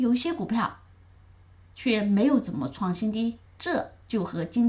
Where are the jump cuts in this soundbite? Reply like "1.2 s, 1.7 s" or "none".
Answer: 3.5 s